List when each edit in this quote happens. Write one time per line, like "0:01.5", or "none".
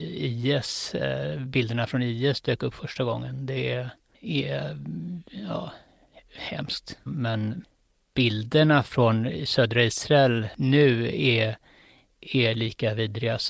0:07.1